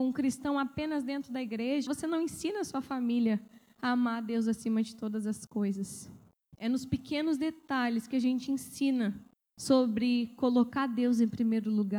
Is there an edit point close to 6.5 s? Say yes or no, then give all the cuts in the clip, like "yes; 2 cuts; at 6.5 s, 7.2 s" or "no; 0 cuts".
yes; 2 cuts; at 1.9 s, 6.5 s